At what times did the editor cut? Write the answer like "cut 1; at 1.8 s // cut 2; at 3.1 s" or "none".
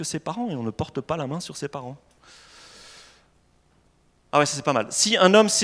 none